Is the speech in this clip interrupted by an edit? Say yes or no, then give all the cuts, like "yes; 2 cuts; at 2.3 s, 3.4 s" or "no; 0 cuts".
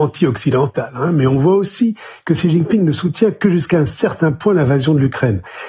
no; 0 cuts